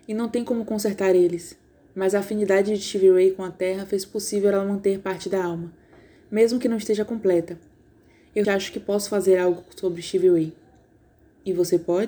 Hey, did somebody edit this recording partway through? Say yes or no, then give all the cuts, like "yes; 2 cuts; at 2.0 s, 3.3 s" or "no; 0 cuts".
yes; 1 cut; at 8.4 s